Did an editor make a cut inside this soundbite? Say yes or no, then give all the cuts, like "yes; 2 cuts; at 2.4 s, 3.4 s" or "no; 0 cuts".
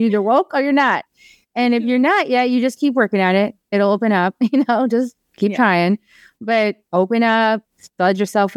no; 0 cuts